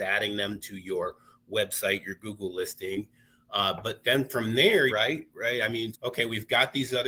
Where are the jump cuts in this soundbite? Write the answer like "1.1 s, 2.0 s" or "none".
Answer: 4.9 s, 5.9 s